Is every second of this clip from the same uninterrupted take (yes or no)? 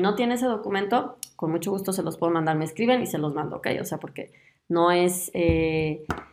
yes